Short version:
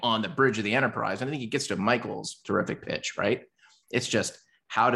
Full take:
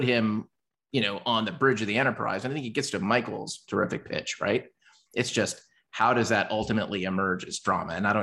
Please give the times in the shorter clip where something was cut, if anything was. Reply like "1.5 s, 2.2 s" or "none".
none